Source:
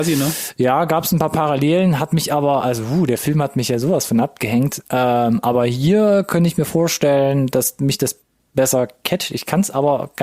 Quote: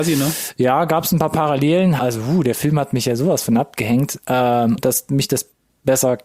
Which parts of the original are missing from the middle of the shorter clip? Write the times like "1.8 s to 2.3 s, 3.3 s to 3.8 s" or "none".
2.0 s to 2.6 s, 5.4 s to 7.5 s